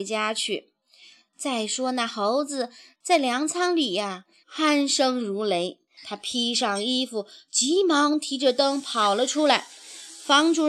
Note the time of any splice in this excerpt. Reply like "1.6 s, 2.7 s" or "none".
4.4 s, 6.0 s